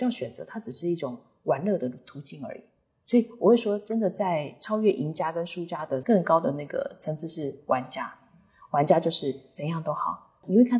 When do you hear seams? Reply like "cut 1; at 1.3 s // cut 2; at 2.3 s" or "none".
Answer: none